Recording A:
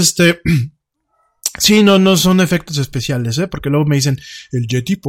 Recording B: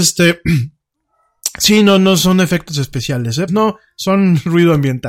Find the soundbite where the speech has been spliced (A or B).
B